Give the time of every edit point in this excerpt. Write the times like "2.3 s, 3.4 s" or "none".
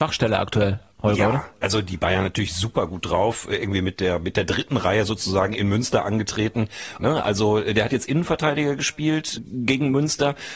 7.0 s, 9.4 s